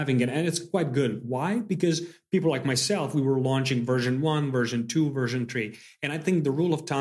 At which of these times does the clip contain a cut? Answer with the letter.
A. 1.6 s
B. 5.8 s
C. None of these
C